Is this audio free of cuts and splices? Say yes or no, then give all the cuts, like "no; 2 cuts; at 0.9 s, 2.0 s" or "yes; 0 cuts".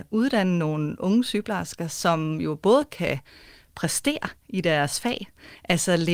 yes; 0 cuts